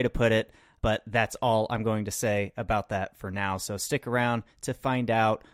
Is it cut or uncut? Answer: uncut